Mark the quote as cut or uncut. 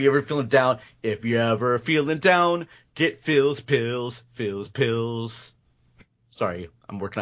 uncut